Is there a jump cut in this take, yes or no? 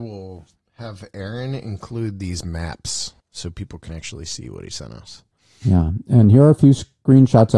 yes